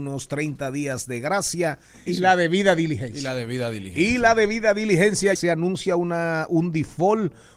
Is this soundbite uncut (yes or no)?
no